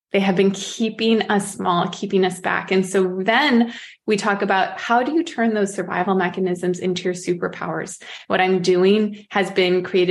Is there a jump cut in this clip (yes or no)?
yes